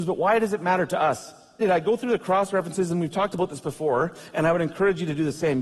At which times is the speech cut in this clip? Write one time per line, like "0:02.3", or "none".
0:01.6